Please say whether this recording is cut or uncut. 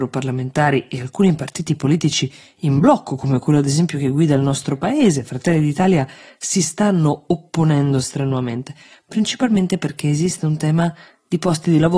uncut